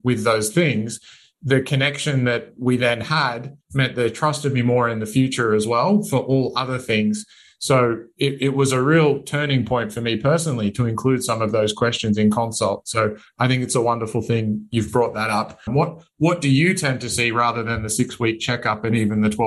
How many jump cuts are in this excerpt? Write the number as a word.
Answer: one